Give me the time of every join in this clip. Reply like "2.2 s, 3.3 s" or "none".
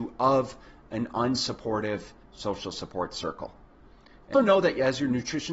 4.3 s